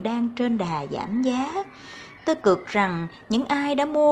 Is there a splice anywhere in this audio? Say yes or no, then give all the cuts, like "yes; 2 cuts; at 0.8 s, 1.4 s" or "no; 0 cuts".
no; 0 cuts